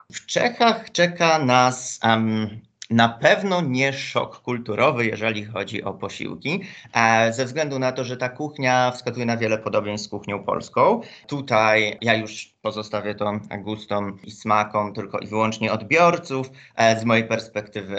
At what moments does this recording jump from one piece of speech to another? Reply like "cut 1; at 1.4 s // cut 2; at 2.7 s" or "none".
none